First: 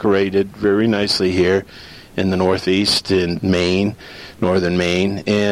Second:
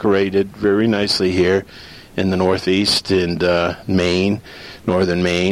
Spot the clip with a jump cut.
first; 1 cut; at 3.4 s

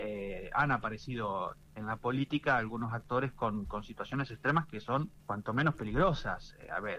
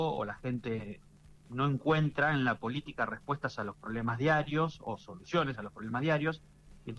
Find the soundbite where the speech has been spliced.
first; 1 cut; at 5.2 s

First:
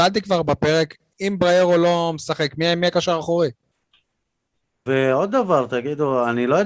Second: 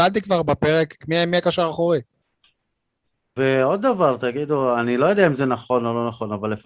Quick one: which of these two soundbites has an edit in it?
second; 1 cut; at 1.0 s

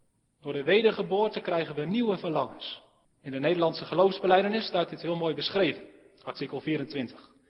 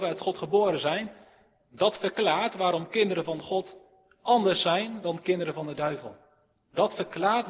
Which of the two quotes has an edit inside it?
first; 1 cut; at 3.0 s

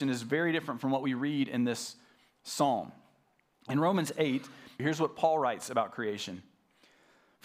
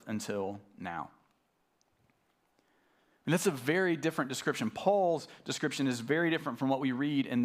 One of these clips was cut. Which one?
first; 2 cuts; at 3.5 s, 4.8 s

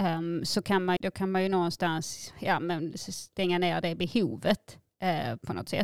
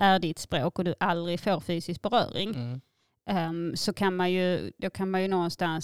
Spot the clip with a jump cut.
first; 1 cut; at 1.0 s

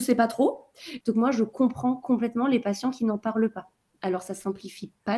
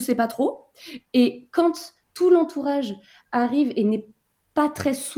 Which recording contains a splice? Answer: first; 1 cut; at 1.0 s

